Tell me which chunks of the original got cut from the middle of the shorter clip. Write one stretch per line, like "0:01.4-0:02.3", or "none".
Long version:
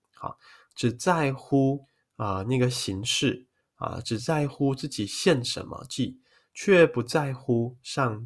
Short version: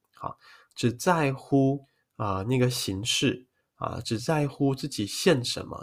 none